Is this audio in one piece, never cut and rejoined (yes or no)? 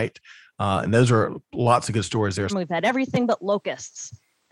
no